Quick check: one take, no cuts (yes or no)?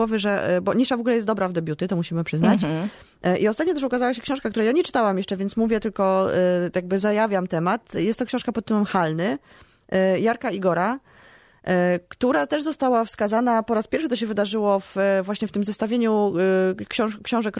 yes